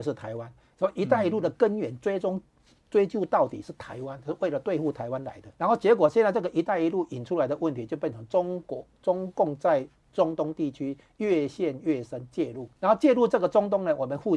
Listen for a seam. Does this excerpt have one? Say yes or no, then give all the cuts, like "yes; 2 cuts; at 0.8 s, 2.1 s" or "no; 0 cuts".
yes; 2 cuts; at 5.5 s, 12.8 s